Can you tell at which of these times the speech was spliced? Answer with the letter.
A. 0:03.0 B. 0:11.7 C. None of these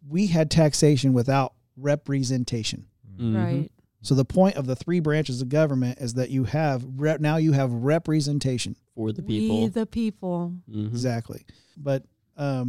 B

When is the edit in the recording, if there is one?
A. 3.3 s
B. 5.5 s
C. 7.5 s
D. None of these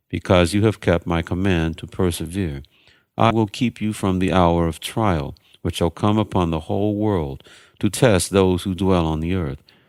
A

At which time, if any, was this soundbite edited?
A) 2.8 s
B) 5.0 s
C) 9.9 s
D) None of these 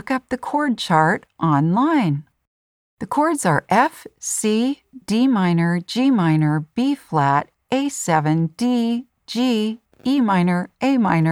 D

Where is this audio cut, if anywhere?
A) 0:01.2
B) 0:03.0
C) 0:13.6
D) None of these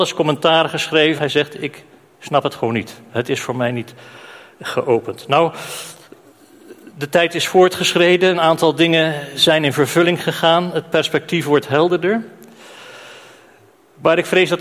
A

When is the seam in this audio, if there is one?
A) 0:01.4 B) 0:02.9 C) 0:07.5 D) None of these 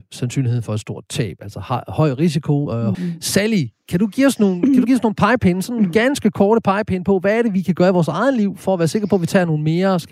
B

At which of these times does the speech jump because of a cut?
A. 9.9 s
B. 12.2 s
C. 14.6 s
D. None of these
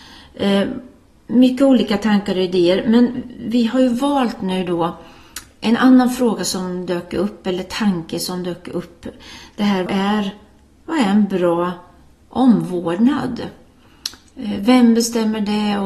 A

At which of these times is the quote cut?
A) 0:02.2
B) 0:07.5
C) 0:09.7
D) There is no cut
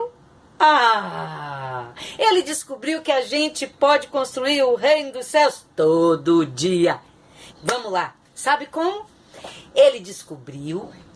B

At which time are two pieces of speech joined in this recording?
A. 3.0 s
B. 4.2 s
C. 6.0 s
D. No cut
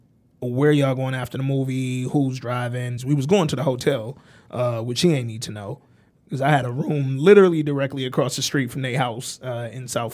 A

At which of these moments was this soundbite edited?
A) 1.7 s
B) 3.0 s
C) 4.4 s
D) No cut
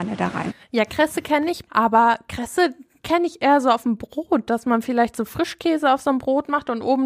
A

